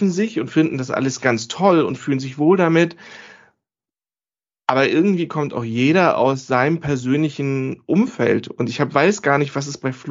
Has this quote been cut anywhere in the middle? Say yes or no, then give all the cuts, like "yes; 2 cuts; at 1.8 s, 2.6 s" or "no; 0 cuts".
no; 0 cuts